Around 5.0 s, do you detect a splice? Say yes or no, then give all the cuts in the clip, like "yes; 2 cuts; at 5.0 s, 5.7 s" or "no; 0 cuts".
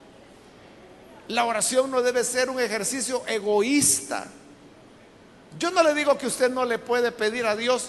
no; 0 cuts